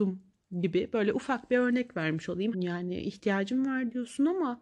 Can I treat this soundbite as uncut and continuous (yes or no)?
no